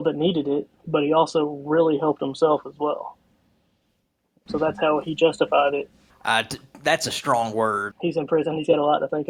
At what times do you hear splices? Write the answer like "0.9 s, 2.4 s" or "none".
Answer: 4.5 s, 6.1 s, 7.9 s